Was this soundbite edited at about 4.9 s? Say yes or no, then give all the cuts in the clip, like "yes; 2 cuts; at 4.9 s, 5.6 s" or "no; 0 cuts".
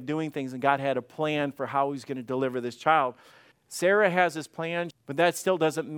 yes; 2 cuts; at 3.5 s, 4.9 s